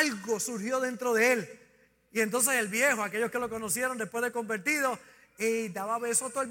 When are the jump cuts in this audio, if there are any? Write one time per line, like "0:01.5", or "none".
none